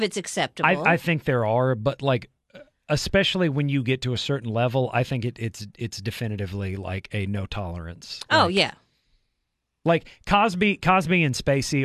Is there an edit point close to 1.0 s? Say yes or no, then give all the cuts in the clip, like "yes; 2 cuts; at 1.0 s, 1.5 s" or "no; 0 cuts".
no; 0 cuts